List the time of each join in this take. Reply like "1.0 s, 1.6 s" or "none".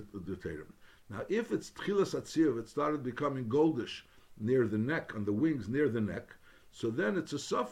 none